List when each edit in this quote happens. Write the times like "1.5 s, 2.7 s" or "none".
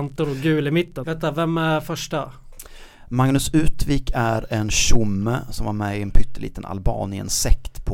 1.0 s